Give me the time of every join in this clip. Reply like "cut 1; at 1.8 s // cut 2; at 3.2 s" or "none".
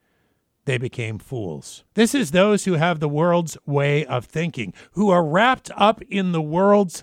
cut 1; at 1.9 s